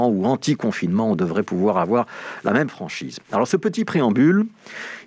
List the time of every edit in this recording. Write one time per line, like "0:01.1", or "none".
none

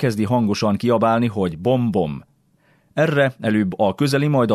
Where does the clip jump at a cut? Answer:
none

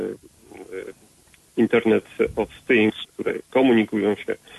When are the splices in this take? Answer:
0:03.0

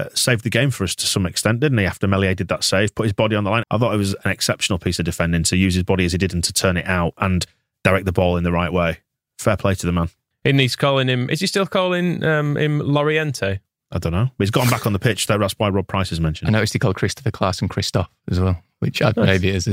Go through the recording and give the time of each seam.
0:03.6
0:10.3

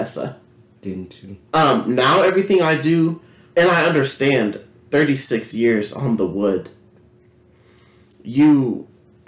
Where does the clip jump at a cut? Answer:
0:01.5
0:03.5

